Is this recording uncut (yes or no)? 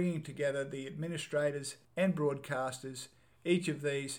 no